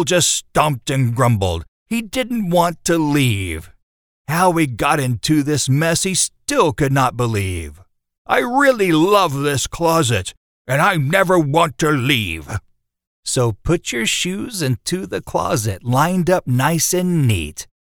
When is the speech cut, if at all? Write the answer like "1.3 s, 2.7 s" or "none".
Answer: 8.2 s, 13.1 s